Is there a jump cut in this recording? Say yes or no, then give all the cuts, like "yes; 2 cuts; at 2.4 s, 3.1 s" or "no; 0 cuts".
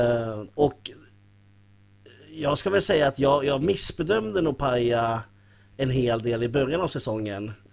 no; 0 cuts